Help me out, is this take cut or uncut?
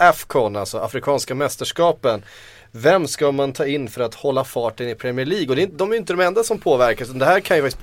uncut